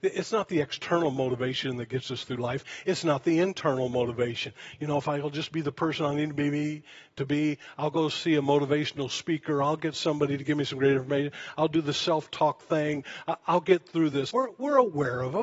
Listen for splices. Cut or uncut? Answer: cut